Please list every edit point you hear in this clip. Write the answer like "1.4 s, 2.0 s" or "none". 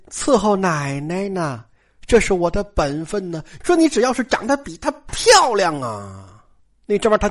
3.6 s